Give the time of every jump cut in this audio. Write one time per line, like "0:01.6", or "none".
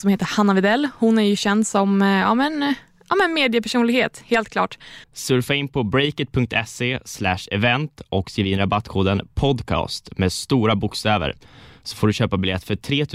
0:05.0